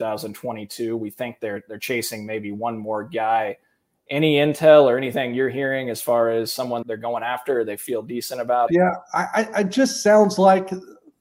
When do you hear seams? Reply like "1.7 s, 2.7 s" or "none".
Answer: 6.8 s, 8.7 s